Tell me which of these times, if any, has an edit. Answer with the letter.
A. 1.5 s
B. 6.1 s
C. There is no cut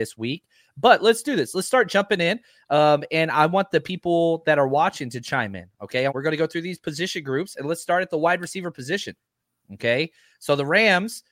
B